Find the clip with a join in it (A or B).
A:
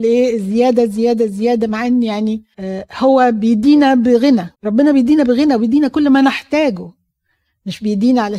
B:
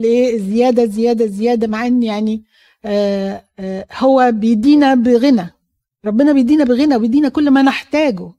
A